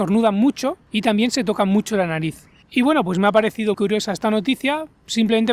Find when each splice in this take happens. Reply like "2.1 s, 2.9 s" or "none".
2.6 s, 3.7 s

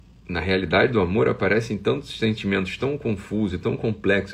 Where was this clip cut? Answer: none

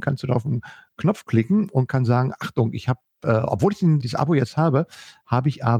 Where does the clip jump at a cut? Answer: 4.0 s

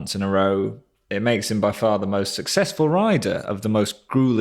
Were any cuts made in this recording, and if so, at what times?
none

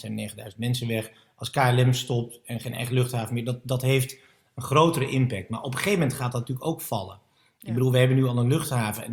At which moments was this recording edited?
none

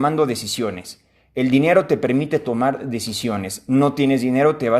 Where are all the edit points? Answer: none

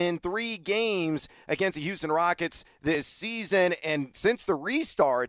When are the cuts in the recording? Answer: none

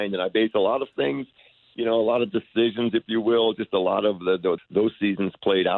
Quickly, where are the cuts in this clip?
4.6 s

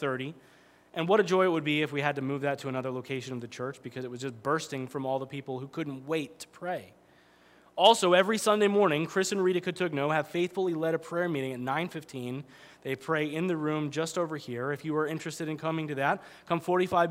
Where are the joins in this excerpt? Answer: none

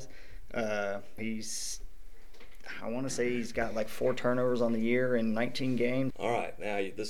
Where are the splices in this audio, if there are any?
1.2 s, 6.1 s

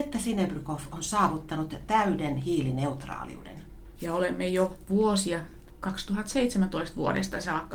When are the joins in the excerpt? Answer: 4.0 s

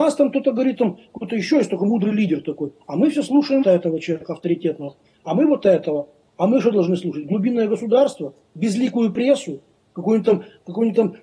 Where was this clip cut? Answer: 3.6 s

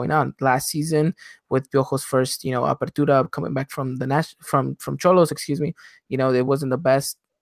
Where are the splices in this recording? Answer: none

